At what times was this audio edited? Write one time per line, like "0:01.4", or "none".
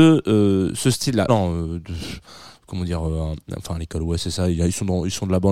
0:01.3